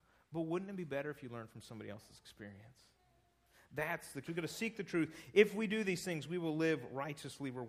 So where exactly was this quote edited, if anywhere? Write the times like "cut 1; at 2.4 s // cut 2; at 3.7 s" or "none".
cut 1; at 4.3 s